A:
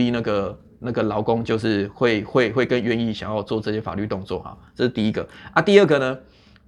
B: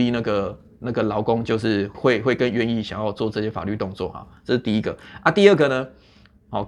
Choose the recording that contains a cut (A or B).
B